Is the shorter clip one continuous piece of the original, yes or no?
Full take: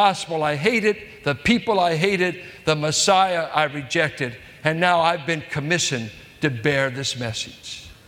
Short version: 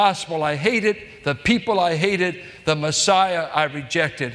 yes